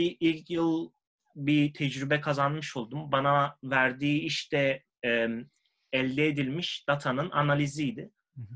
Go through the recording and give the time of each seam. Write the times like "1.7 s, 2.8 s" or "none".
none